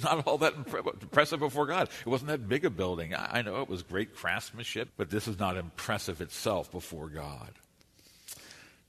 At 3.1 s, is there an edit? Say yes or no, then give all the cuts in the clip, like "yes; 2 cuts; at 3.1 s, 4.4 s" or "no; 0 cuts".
no; 1 cut; at 4.9 s